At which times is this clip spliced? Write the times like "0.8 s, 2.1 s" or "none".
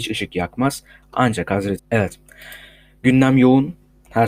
1.8 s